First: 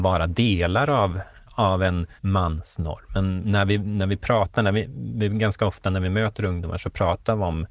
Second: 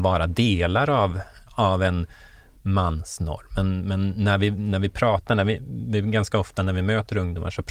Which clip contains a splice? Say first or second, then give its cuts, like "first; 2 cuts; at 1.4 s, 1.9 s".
first; 2 cuts; at 2.2 s, 3.4 s